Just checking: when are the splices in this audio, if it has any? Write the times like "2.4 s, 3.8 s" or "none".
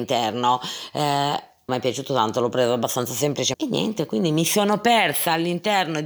1.7 s, 3.5 s

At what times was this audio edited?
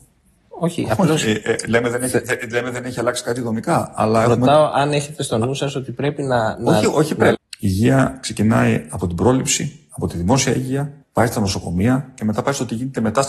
7.3 s, 11.0 s

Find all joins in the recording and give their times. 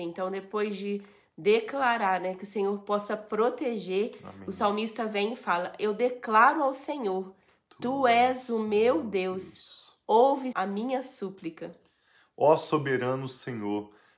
10.5 s

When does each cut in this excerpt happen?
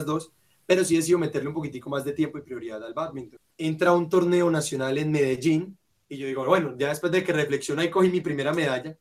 3.5 s

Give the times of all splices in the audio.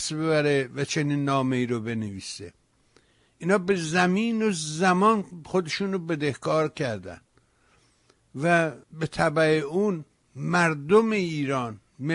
8.8 s

